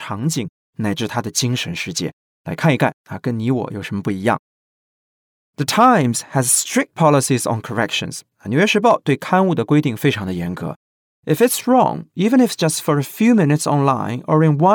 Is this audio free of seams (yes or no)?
yes